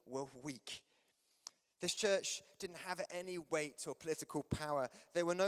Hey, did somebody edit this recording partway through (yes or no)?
no